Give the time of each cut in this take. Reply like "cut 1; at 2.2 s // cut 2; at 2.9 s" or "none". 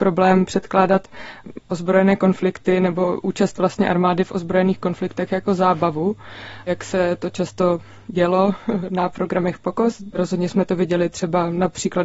none